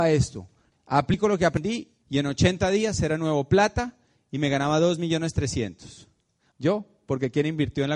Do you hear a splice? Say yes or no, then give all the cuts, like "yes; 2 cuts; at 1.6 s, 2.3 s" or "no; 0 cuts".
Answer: yes; 2 cuts; at 2.0 s, 6.5 s